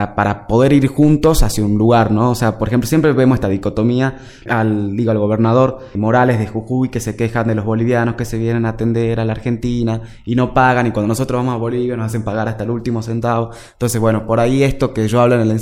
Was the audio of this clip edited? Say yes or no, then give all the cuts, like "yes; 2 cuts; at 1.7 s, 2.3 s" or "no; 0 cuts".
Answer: yes; 2 cuts; at 4.5 s, 6.0 s